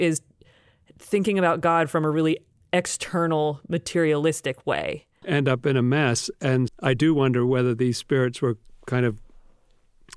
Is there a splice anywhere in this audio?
yes; 2 cuts; at 5.2 s, 6.7 s

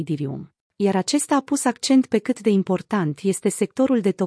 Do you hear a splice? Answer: no; 0 cuts

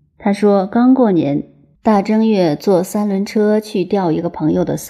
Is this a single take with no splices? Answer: yes; 0 cuts

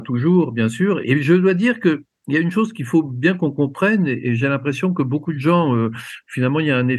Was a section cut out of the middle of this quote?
yes; 1 cut; at 1.0 s

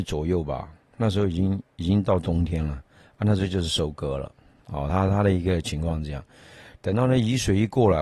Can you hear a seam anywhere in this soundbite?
no; 0 cuts

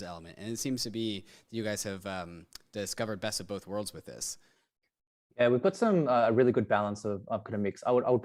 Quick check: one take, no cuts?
yes; 0 cuts

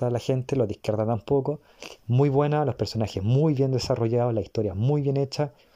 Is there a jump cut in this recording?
yes; 1 cut; at 2.0 s

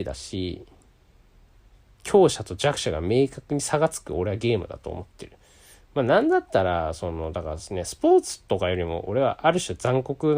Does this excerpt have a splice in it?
no; 0 cuts

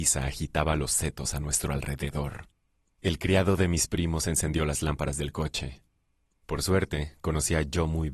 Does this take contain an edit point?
no; 0 cuts

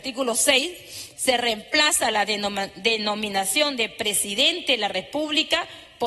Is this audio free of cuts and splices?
yes; 0 cuts

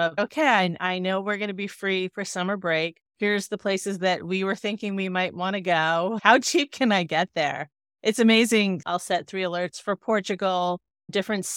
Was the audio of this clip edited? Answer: yes; 2 cuts; at 3.1 s, 8.8 s

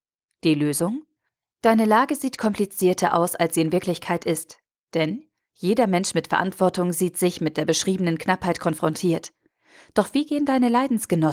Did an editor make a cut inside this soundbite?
no; 0 cuts

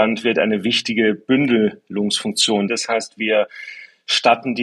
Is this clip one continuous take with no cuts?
no; 1 cut; at 2.7 s

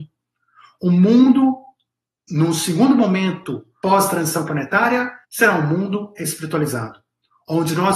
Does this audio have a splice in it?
yes; 1 cut; at 5.2 s

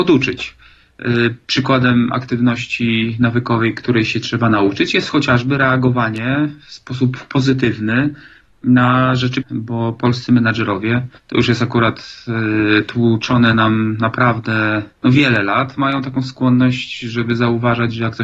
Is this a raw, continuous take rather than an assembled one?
no; 3 cuts; at 9.4 s, 11.2 s, 14.9 s

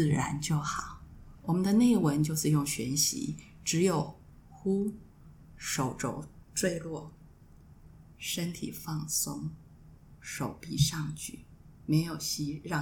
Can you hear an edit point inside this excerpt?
yes; 1 cut; at 1.3 s

